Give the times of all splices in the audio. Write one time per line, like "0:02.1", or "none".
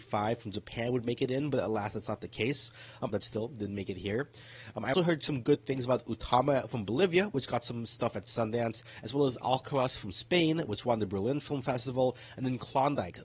0:03.1
0:04.9